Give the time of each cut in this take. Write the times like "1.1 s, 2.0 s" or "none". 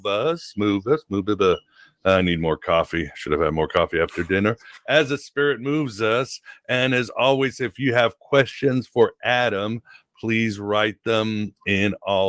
none